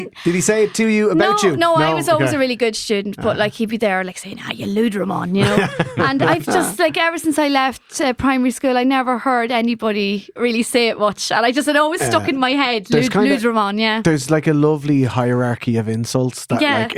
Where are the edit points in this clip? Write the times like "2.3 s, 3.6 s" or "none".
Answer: 10.4 s